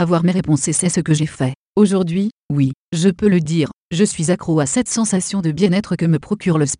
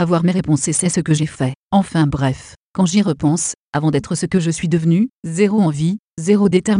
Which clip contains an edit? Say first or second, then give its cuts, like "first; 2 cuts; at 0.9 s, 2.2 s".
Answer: second; 2 cuts; at 1.6 s, 5.1 s